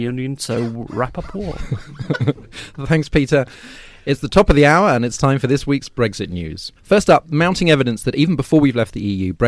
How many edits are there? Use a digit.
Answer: 1